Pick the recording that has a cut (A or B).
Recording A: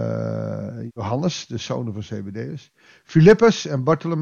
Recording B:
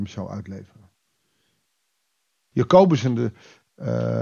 B